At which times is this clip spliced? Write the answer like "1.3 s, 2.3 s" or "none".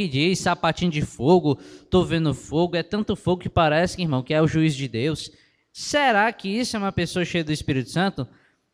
none

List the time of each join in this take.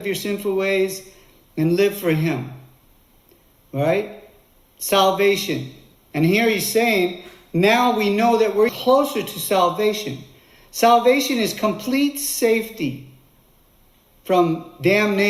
5.9 s, 8.7 s

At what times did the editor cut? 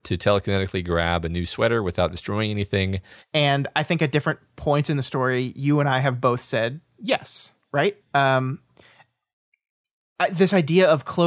3.2 s, 8.0 s

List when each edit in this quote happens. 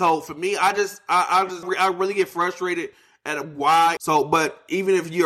1.6 s, 4.0 s

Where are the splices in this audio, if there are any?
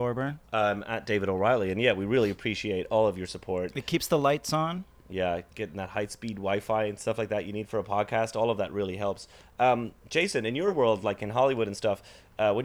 none

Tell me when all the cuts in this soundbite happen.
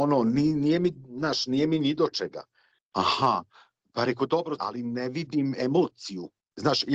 2.7 s, 4.6 s

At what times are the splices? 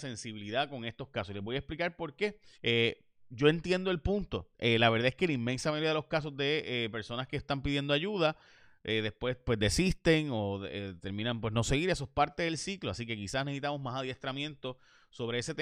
2.5 s, 4.5 s

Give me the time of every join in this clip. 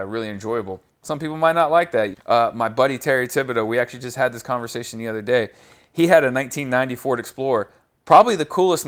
2.1 s

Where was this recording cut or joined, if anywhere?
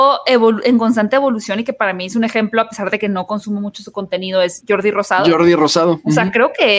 4.6 s

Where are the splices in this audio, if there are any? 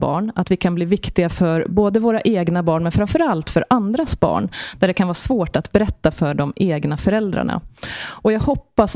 none

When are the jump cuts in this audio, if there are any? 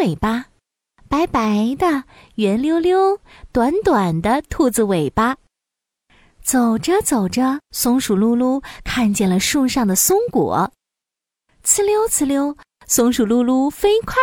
7.6 s

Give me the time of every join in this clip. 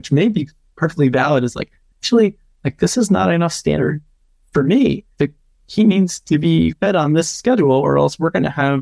5.1 s

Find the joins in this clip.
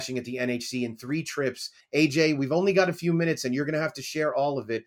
1.8 s

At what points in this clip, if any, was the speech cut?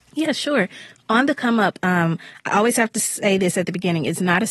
none

